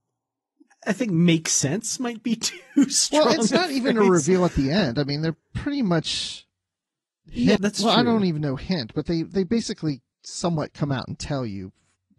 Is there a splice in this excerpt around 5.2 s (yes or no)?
no